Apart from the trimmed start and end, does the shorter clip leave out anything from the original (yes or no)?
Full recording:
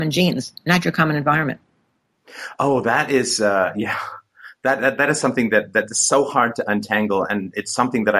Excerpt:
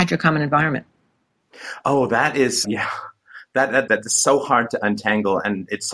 yes